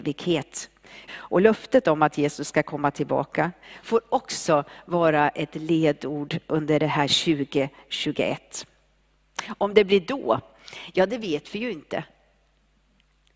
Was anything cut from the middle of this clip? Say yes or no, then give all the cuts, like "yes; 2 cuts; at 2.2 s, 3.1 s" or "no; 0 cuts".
yes; 1 cut; at 1.1 s